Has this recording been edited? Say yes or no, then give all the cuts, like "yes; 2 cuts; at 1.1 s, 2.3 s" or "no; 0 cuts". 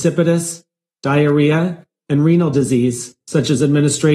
yes; 1 cut; at 3.2 s